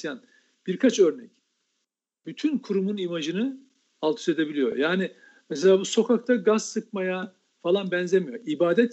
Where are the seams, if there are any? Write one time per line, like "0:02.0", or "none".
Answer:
none

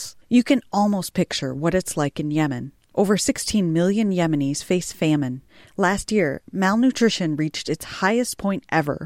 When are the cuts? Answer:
none

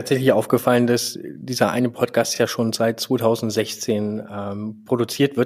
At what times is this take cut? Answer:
none

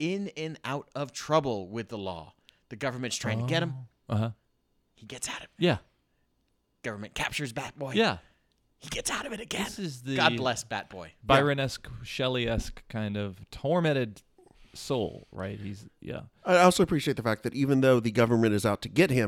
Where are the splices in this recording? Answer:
none

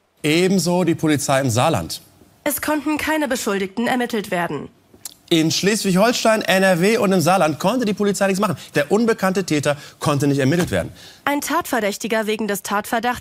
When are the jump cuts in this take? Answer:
0:08.7
0:11.2

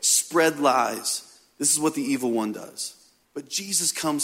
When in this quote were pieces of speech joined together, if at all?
0:03.2

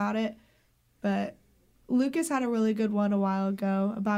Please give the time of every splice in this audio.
none

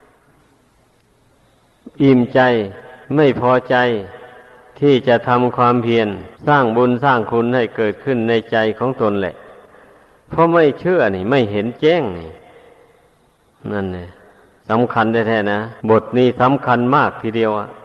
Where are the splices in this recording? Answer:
0:03.0
0:06.3
0:15.8

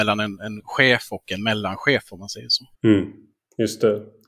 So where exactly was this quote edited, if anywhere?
0:02.7

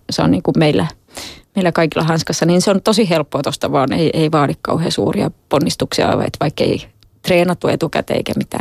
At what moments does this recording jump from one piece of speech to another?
none

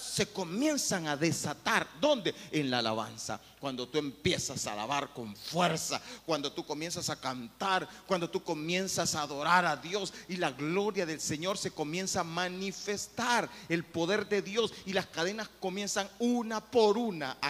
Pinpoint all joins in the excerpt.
none

